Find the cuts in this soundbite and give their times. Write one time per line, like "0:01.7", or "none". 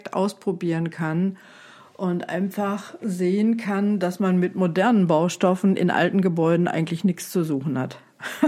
none